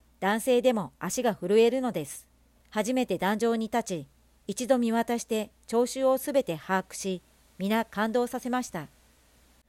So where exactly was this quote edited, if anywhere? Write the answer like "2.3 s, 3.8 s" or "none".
2.5 s

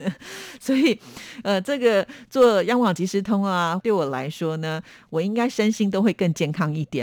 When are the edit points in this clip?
3.8 s

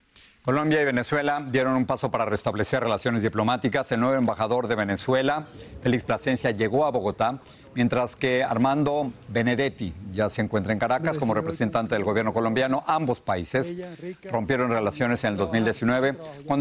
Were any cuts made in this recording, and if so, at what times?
none

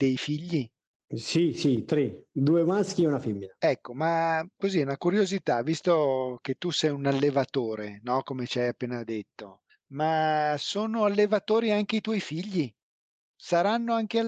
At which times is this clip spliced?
none

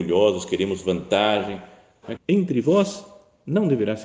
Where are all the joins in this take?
2.2 s

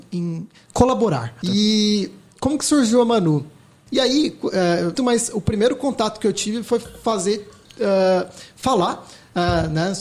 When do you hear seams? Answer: 1.4 s, 3.9 s, 4.9 s

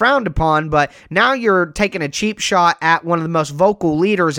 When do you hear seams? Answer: none

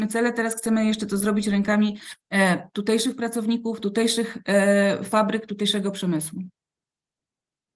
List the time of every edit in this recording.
none

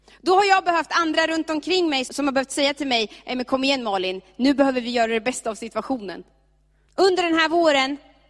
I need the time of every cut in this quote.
2.1 s, 6.9 s

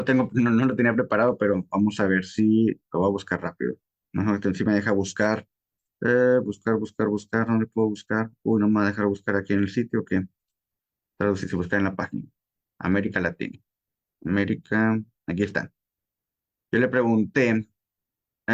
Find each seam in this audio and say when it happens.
none

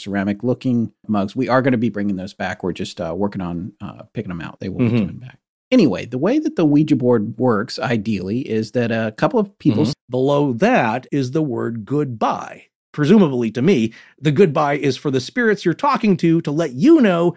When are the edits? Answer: 4.6 s, 9.9 s, 11.1 s

